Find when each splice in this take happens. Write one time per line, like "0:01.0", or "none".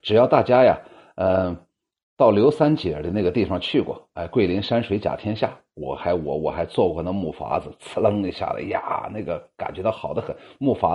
none